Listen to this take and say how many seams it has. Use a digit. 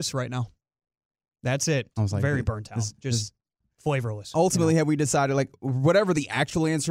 1